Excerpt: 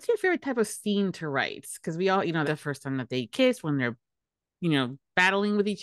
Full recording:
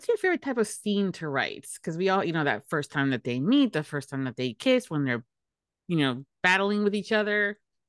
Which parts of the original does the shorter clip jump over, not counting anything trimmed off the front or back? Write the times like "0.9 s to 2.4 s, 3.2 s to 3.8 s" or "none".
2.4 s to 3.7 s